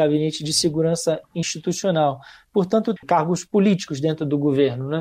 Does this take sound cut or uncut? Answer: cut